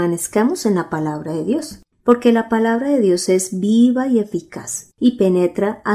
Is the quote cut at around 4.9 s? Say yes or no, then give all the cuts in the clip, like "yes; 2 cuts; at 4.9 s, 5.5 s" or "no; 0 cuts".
yes; 2 cuts; at 1.9 s, 4.9 s